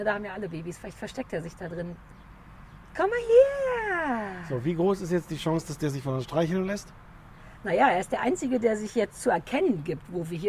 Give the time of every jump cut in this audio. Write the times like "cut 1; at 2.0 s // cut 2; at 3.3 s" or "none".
none